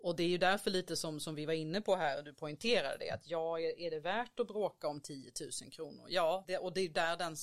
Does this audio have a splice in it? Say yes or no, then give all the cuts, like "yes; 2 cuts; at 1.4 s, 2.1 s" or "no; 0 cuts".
yes; 1 cut; at 6.4 s